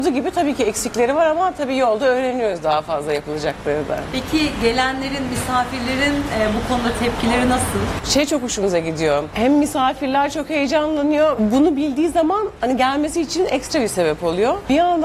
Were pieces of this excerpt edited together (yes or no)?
no